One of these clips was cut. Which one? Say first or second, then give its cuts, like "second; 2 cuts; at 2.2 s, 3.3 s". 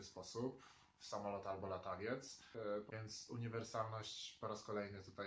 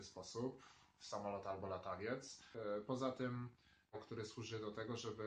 first; 1 cut; at 2.9 s